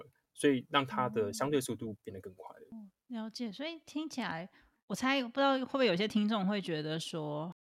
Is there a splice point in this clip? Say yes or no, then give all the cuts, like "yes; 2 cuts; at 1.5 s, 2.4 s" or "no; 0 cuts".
no; 0 cuts